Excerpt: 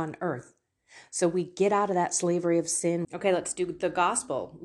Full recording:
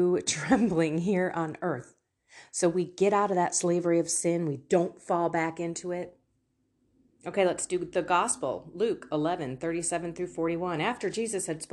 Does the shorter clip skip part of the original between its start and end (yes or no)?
yes